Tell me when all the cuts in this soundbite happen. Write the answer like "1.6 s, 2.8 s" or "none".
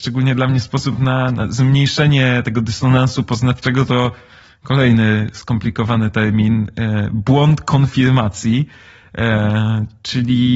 none